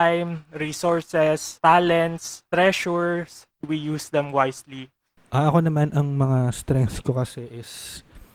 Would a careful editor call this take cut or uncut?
cut